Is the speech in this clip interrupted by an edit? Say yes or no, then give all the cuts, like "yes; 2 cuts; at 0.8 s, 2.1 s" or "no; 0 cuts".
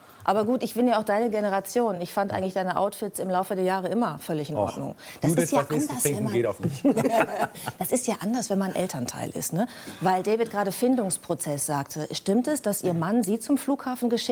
no; 0 cuts